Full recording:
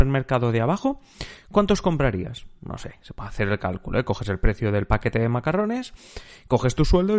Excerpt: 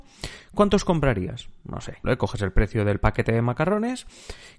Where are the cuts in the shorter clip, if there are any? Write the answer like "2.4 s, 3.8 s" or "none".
2.0 s